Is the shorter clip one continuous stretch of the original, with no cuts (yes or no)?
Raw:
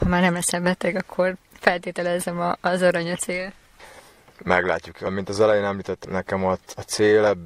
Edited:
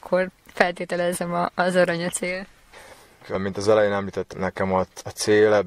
no